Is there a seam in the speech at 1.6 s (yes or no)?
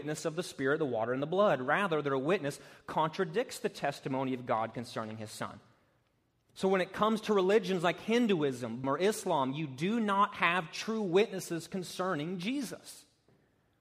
no